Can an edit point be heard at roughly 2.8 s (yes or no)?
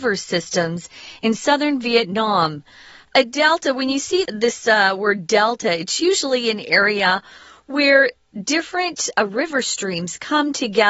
no